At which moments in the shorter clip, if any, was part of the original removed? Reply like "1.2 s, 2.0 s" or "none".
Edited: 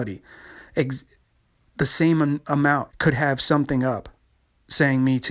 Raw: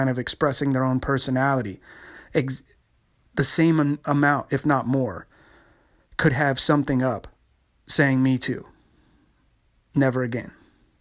2.9 s